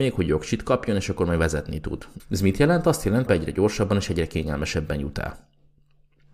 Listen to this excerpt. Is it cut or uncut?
cut